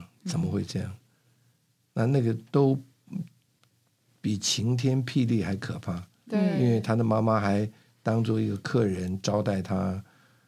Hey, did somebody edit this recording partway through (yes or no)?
no